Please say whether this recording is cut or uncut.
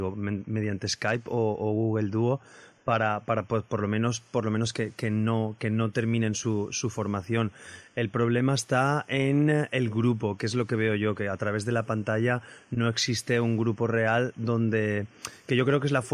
uncut